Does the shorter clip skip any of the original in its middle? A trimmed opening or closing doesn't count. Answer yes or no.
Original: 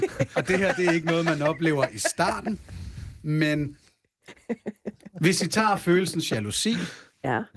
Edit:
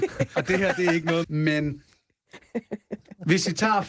yes